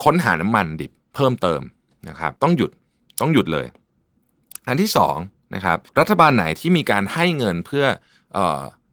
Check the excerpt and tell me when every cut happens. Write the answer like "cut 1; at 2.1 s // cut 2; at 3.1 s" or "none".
cut 1; at 2.4 s // cut 2; at 5.9 s